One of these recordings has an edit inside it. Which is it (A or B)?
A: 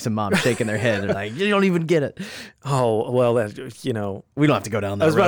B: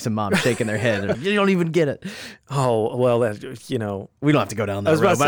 B